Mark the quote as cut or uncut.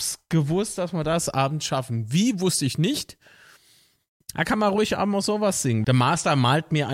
cut